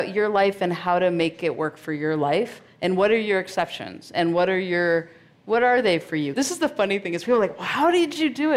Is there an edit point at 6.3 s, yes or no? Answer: yes